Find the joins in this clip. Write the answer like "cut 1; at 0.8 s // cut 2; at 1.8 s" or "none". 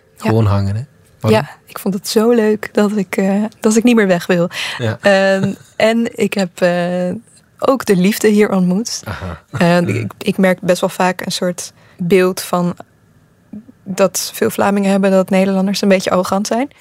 cut 1; at 9.8 s

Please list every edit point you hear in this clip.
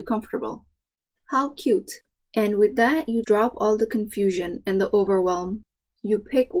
cut 1; at 2.2 s // cut 2; at 3.2 s

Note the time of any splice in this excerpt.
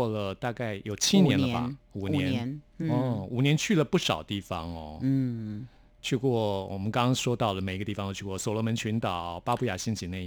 none

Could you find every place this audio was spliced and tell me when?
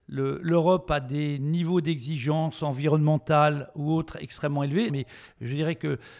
cut 1; at 4.9 s

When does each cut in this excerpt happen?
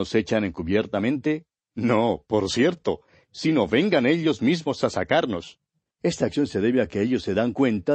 cut 1; at 5.9 s

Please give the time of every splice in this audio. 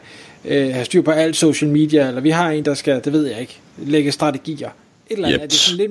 none

